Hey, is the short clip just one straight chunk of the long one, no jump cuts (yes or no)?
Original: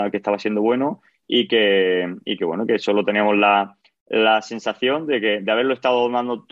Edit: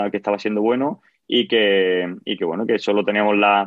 yes